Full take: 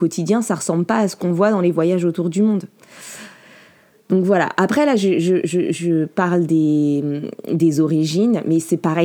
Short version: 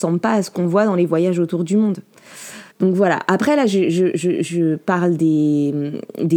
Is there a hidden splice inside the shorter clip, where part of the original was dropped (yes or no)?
yes